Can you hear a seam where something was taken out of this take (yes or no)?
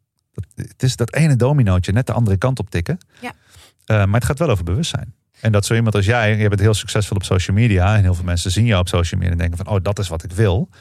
no